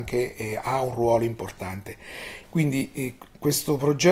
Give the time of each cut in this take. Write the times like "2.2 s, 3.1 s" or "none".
2.4 s